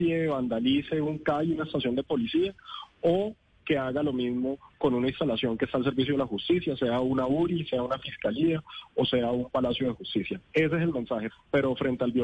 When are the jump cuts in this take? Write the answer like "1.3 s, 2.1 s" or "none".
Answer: 11.3 s